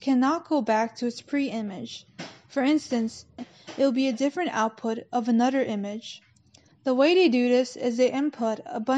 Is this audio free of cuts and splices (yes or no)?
no